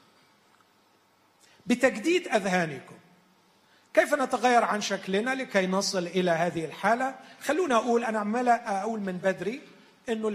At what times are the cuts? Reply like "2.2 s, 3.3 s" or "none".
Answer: none